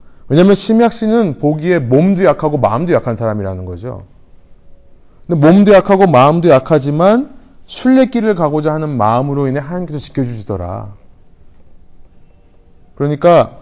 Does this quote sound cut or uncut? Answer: uncut